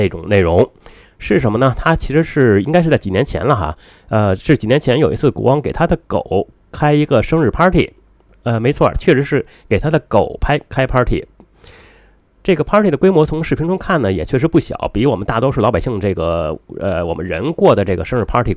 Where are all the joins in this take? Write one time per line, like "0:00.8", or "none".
0:08.9